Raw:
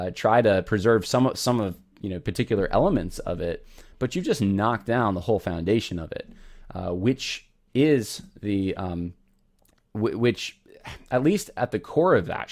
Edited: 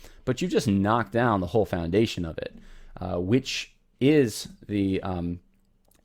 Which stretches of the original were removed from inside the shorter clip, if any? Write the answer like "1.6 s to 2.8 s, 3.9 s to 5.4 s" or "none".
none